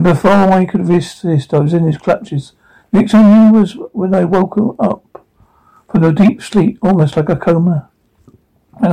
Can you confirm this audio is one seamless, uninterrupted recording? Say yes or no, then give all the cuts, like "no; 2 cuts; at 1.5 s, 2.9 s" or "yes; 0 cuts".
yes; 0 cuts